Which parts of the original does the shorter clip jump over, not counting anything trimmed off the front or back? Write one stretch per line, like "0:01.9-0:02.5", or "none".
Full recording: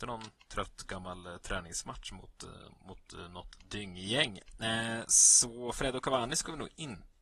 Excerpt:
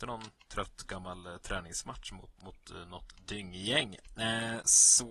0:02.4-0:02.8